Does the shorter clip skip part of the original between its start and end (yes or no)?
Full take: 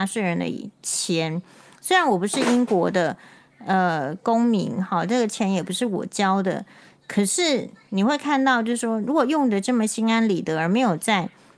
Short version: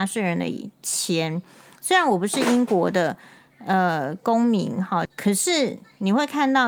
yes